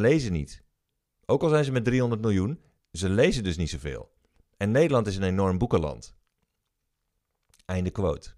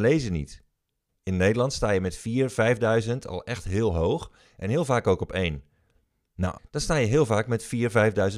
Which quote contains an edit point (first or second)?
second